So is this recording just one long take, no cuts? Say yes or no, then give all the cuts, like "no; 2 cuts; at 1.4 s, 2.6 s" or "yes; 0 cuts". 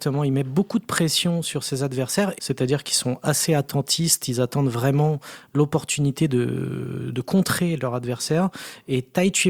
no; 2 cuts; at 2.4 s, 7.1 s